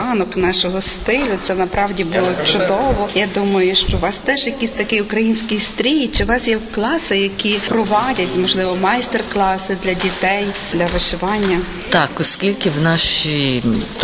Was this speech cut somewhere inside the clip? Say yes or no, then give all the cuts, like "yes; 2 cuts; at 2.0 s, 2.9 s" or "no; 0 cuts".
no; 0 cuts